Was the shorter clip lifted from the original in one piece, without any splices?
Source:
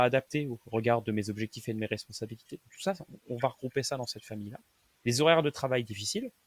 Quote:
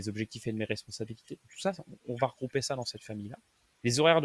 yes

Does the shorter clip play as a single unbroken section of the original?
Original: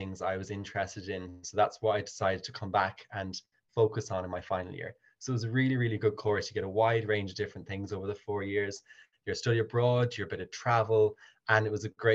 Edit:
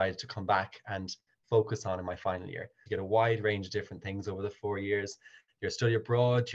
no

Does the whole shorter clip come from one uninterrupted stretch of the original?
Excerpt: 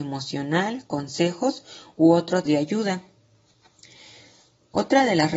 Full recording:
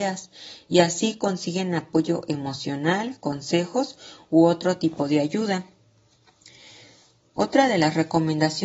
no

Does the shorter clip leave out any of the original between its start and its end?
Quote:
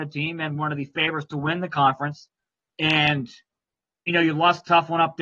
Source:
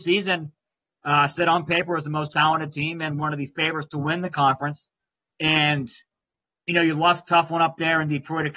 no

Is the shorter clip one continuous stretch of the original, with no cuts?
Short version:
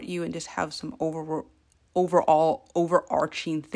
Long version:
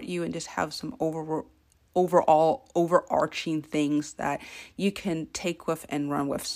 yes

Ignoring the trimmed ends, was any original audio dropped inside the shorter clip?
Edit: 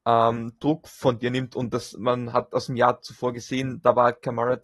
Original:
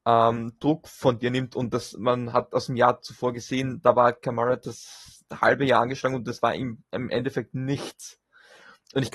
no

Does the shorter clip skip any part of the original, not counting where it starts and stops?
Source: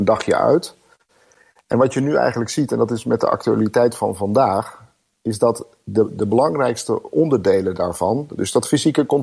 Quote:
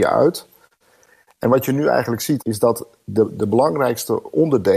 yes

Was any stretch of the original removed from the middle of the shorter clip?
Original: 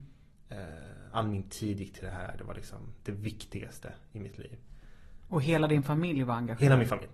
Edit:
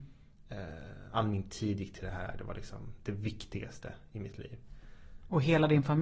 no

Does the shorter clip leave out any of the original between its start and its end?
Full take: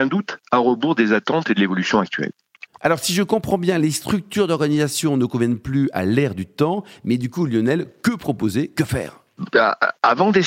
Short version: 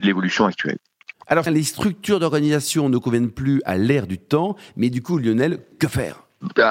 yes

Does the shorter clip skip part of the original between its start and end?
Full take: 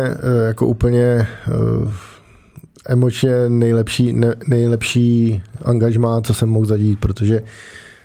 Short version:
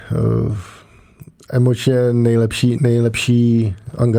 yes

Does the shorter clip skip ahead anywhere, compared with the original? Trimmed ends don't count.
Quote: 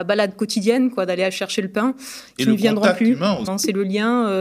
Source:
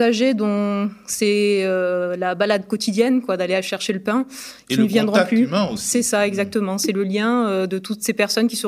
yes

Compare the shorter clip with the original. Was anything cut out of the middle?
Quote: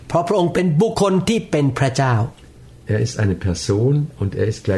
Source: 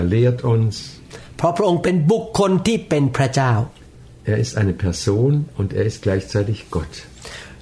yes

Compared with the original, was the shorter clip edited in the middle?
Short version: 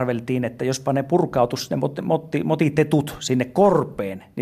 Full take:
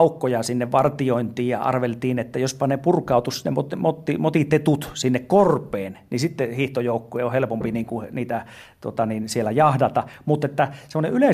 no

